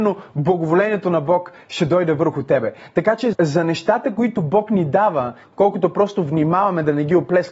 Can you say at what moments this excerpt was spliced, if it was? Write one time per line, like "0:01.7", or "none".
0:03.3
0:05.4